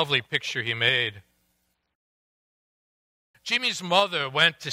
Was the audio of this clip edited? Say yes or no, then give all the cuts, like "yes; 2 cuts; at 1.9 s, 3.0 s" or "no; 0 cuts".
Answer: yes; 1 cut; at 3.3 s